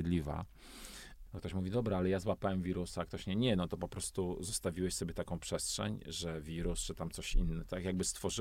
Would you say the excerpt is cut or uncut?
cut